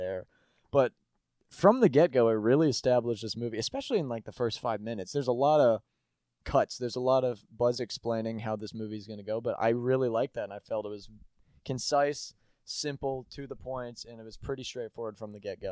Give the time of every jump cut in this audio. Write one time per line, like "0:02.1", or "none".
none